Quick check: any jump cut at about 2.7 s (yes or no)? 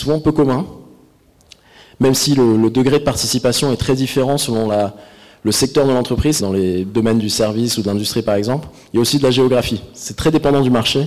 no